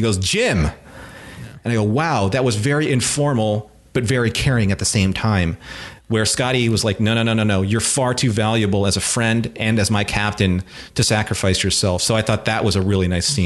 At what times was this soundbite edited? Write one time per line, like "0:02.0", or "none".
none